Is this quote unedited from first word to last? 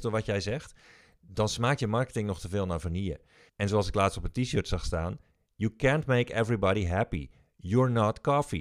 no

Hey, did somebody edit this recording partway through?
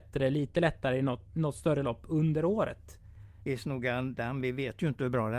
yes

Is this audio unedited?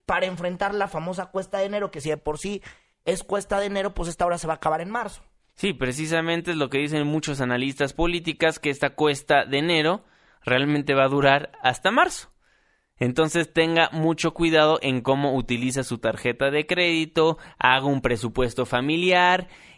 yes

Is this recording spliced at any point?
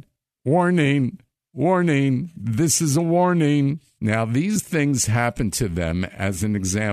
yes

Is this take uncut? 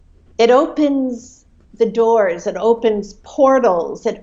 yes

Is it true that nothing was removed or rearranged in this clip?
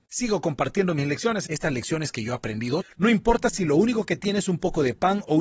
no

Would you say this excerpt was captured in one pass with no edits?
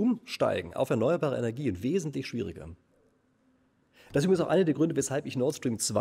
yes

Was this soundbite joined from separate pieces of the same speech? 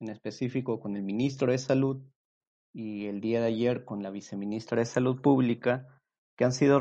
no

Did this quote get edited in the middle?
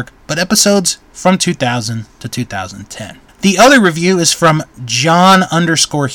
yes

